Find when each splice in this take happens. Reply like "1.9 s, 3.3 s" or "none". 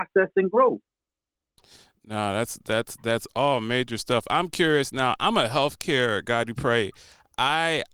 none